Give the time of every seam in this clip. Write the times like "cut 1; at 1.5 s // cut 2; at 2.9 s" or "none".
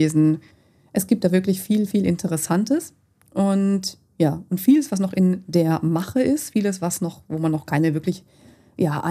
none